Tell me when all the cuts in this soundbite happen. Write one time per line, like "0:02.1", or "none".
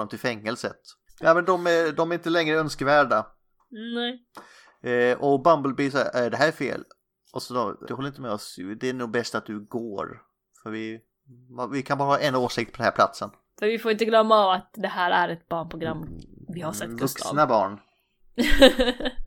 0:01.1
0:07.9
0:13.5